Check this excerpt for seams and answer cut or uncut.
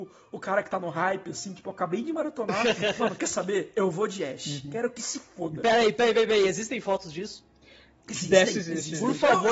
uncut